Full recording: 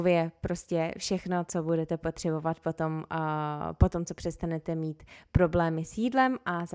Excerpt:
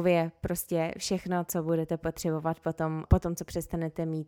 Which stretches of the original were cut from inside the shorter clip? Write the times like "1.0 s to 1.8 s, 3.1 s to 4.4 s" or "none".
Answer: 3.1 s to 3.8 s